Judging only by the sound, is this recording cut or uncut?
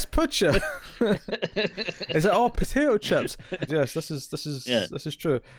cut